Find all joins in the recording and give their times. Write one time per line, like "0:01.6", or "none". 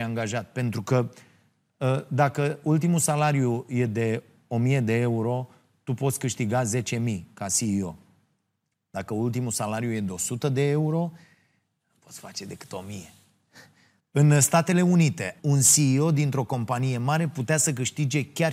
0:14.0
0:15.4